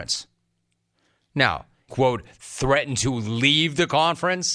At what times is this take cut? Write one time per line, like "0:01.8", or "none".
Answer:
0:01.9